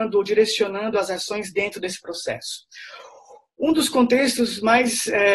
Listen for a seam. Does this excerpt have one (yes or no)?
no